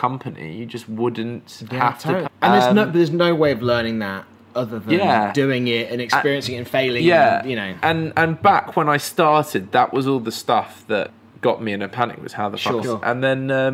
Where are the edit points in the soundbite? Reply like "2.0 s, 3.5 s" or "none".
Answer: 2.2 s, 7.8 s, 12.8 s